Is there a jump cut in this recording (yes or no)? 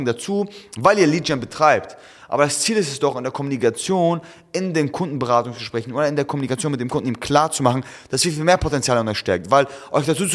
no